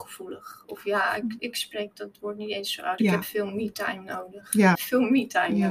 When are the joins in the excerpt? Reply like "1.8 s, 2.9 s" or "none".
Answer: 3.0 s, 4.8 s